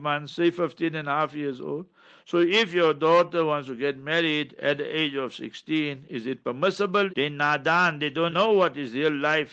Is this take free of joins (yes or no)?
no